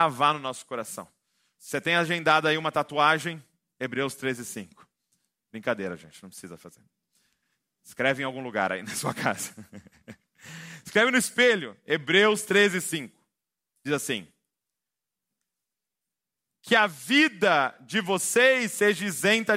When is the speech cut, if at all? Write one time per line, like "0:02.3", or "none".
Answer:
0:01.6